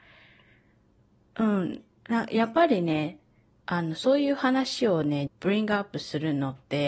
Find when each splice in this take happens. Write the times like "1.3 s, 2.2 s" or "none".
1.3 s, 5.3 s